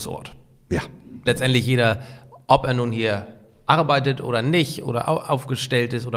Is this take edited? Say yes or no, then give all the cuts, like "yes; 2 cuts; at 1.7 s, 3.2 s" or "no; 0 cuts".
yes; 1 cut; at 1.3 s